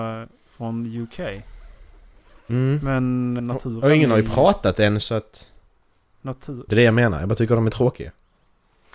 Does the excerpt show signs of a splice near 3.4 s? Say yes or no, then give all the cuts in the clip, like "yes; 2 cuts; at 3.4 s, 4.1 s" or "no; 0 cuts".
yes; 2 cuts; at 3.4 s, 6.7 s